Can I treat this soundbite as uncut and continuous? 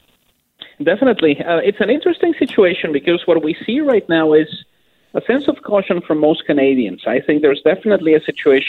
yes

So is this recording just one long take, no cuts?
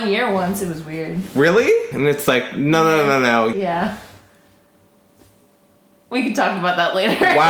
no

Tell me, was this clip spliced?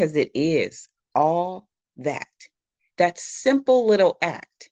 no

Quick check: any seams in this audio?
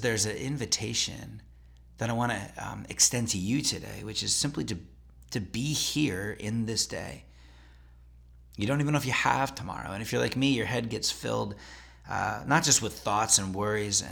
no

